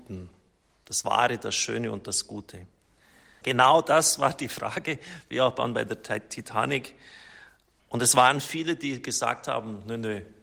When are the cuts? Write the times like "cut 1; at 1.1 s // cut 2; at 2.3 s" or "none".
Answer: cut 1; at 3.4 s // cut 2; at 7.8 s